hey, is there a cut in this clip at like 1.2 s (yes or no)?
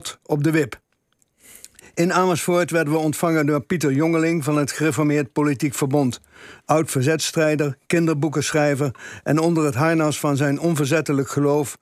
no